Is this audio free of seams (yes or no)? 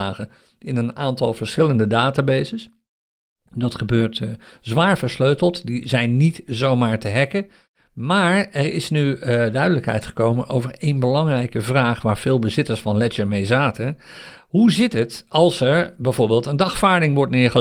yes